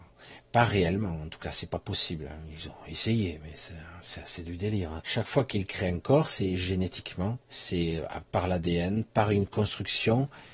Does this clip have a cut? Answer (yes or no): yes